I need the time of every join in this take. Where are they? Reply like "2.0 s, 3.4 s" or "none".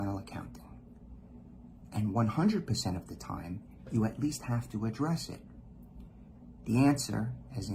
6.6 s